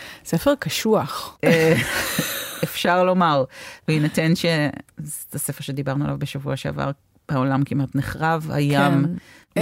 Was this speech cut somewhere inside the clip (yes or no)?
no